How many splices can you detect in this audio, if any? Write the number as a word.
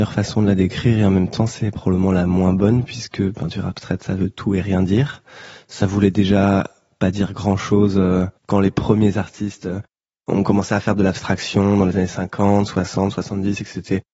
one